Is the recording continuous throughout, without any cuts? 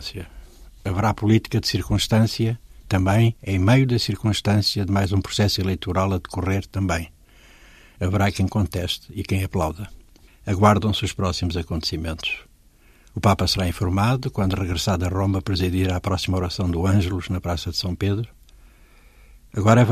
no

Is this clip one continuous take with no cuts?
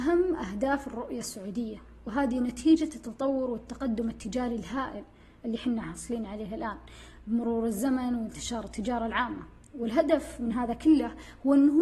yes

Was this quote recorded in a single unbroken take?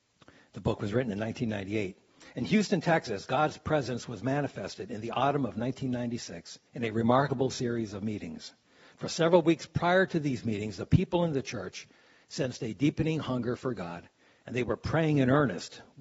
no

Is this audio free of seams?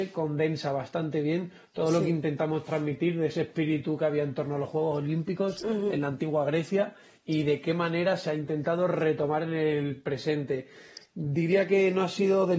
yes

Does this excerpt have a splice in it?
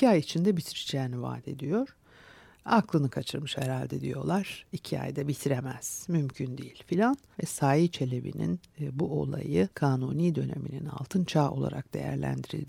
yes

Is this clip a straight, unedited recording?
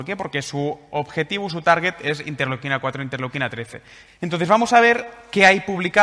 no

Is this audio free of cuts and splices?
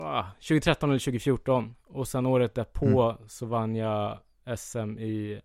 yes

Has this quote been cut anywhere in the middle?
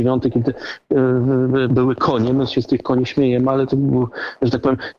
yes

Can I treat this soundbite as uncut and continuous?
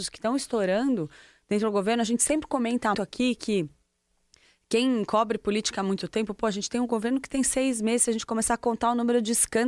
no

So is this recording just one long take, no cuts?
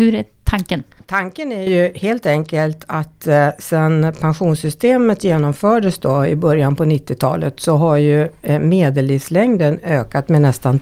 yes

